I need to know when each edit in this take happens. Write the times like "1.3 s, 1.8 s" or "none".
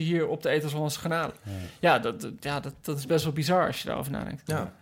none